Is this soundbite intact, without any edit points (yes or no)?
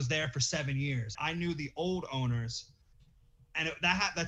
no